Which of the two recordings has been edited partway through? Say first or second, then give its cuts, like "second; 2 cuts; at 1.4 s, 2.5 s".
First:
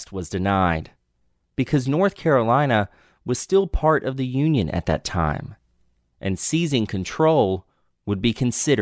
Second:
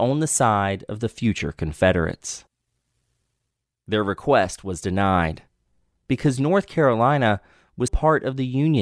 second; 1 cut; at 7.9 s